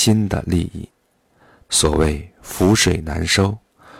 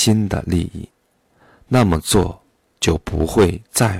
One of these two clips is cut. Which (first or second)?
first